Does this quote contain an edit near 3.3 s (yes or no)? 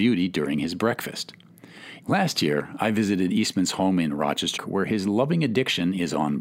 no